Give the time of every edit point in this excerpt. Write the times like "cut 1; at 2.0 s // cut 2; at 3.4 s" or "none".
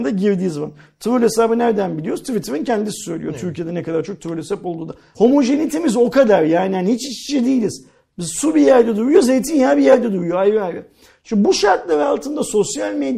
cut 1; at 5.1 s